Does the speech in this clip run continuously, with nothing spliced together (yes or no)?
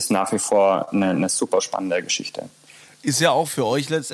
yes